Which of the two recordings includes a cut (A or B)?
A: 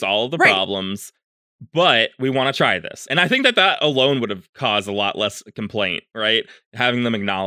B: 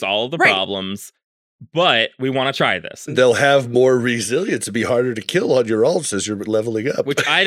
B